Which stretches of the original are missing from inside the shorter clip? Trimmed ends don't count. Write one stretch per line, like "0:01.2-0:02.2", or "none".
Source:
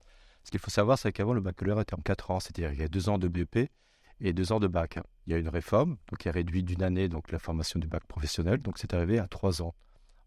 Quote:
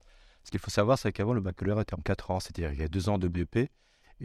none